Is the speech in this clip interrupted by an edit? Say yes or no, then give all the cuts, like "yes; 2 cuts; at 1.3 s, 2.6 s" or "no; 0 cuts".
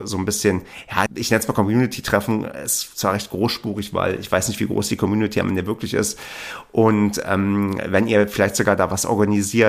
yes; 1 cut; at 1.1 s